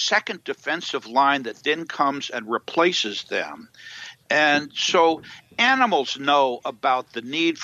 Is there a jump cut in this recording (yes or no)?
no